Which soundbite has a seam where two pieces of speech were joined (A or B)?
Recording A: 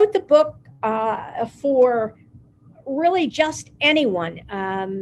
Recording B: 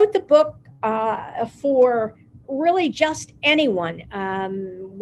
B